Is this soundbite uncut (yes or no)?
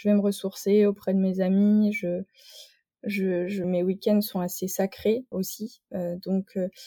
no